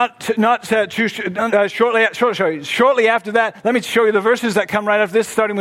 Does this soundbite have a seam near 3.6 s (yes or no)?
no